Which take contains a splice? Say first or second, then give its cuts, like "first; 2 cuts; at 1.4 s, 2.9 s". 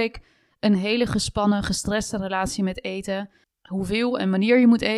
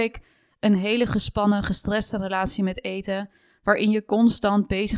first; 1 cut; at 3.4 s